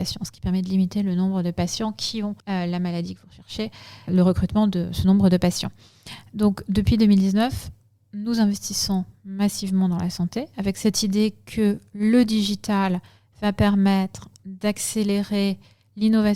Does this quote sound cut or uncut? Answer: cut